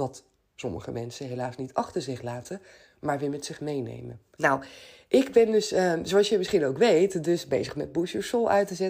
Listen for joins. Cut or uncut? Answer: cut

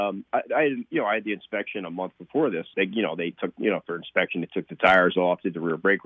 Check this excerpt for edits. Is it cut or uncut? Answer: cut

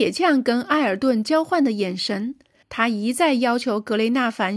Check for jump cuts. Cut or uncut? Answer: cut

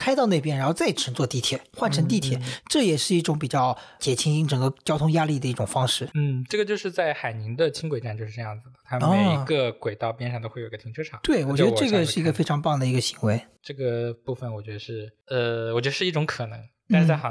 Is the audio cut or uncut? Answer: uncut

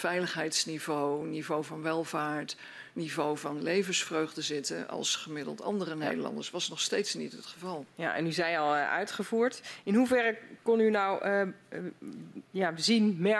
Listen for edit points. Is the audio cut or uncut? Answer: uncut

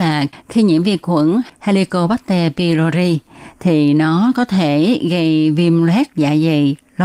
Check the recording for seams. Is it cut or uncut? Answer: uncut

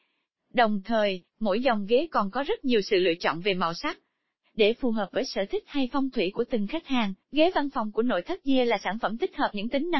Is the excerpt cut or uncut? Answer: cut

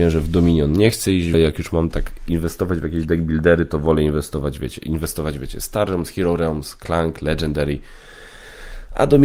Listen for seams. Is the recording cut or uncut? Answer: cut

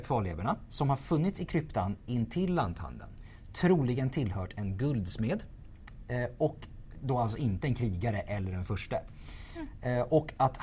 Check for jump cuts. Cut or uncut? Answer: uncut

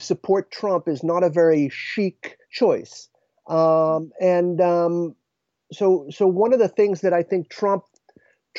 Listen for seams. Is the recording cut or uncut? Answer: cut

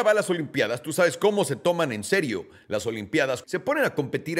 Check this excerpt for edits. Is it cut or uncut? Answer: cut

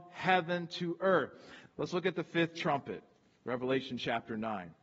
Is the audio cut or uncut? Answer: cut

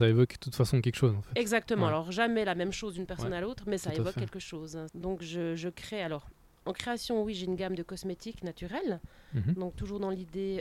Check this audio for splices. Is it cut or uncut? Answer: cut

